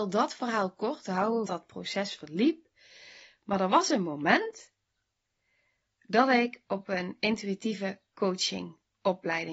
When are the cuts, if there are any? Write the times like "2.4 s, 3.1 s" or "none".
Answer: 1.4 s